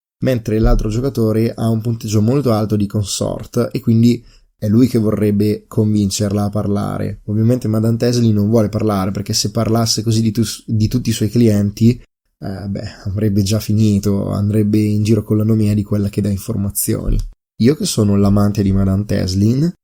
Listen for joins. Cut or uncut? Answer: cut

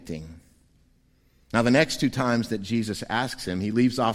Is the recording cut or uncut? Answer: uncut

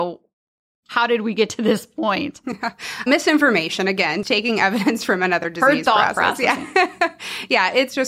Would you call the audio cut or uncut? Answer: cut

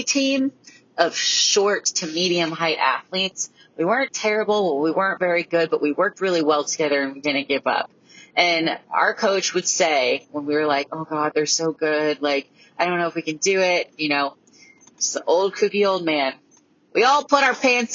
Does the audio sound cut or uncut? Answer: uncut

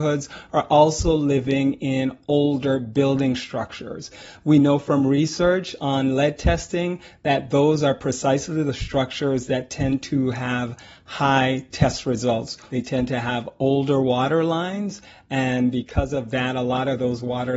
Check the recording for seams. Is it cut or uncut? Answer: uncut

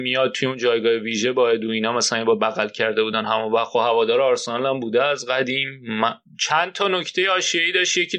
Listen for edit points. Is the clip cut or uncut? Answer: cut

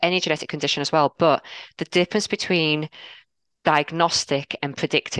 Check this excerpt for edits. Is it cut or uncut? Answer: uncut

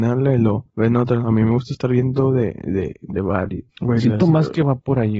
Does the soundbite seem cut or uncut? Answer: cut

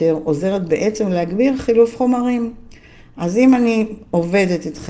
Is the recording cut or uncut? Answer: uncut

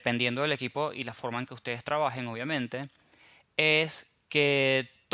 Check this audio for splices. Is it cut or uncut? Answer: uncut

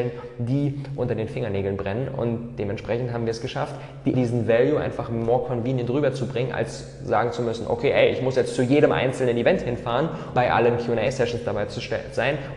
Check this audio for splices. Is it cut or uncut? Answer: cut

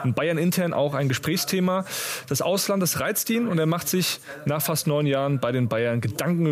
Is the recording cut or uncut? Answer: uncut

